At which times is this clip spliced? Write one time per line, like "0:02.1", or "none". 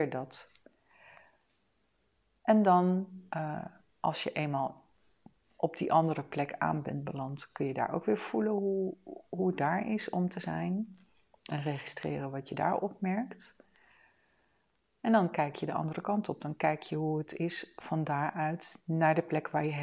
0:18.8